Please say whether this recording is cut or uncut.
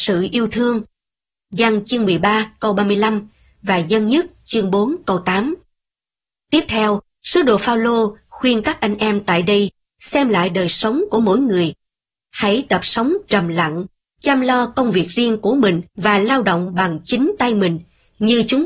cut